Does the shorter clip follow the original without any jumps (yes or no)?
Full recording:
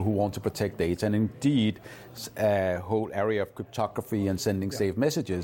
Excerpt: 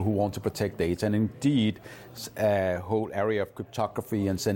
yes